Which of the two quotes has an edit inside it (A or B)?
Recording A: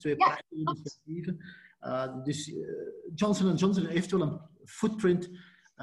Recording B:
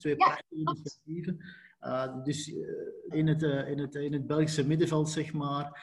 B